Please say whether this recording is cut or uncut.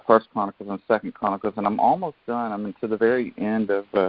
uncut